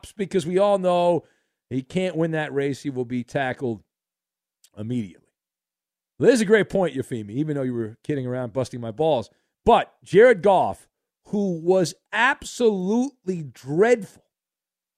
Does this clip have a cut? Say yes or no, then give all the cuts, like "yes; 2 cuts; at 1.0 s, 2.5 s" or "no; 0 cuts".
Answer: no; 0 cuts